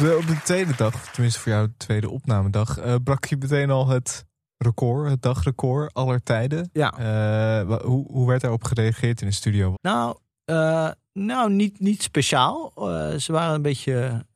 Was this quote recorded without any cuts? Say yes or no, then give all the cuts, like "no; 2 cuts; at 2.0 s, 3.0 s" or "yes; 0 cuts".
no; 1 cut; at 9.7 s